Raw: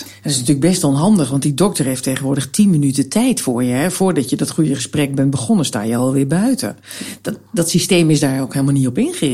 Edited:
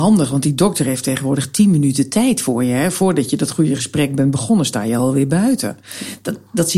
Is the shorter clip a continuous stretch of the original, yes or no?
yes